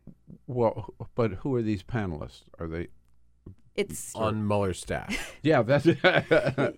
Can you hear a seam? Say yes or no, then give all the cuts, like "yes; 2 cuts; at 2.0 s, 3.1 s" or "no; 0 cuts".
yes; 1 cut; at 4.1 s